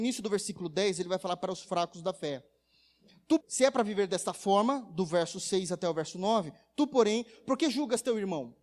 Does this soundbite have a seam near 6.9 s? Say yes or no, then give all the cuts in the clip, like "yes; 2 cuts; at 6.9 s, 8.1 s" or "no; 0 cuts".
no; 1 cut; at 3.4 s